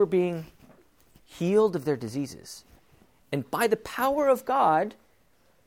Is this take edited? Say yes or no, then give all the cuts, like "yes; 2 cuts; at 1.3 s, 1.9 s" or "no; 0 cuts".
no; 0 cuts